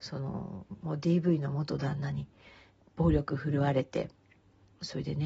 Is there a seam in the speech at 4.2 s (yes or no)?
no